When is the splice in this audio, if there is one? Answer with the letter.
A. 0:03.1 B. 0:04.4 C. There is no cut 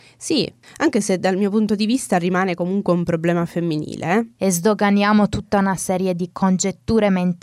B